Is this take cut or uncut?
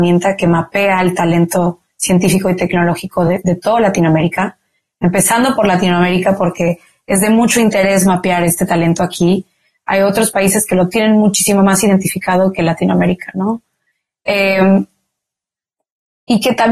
uncut